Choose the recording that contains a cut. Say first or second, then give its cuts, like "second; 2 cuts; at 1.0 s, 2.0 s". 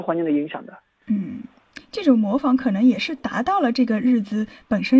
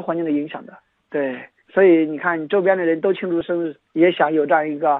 second; 2 cuts; at 1.0 s, 3.9 s